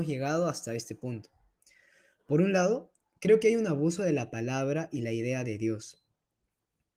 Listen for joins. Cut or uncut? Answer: uncut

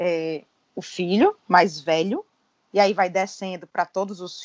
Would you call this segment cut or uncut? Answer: uncut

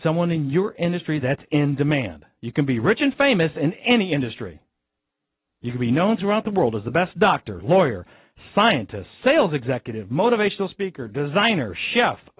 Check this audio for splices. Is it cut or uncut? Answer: uncut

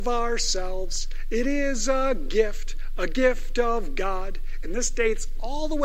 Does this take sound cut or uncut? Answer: cut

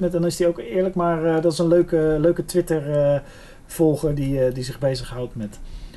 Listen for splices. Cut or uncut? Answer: uncut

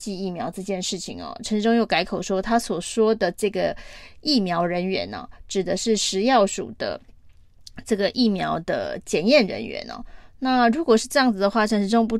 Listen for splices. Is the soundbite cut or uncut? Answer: uncut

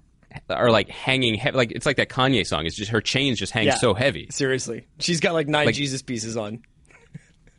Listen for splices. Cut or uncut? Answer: uncut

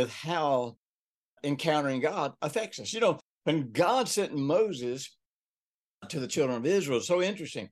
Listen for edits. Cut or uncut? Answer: uncut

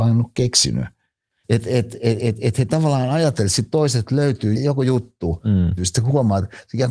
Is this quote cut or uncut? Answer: cut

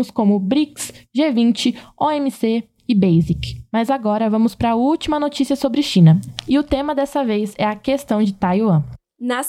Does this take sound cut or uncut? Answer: uncut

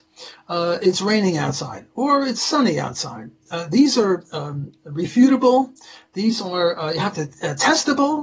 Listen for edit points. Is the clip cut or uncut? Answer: uncut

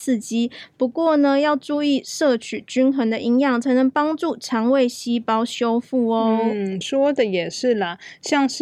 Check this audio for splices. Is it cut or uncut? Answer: uncut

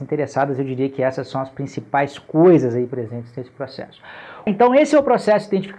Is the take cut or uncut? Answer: cut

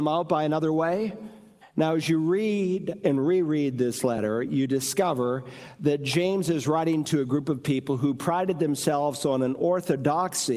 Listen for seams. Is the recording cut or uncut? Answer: cut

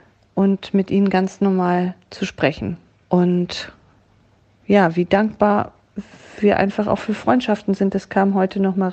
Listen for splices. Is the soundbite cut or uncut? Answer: uncut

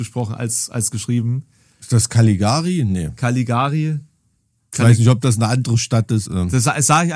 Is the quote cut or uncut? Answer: cut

